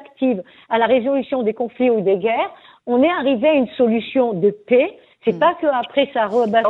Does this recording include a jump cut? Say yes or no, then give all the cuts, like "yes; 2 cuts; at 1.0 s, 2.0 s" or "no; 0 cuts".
yes; 1 cut; at 5.1 s